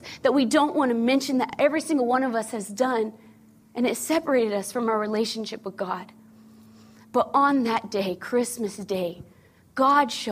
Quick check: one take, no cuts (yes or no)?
yes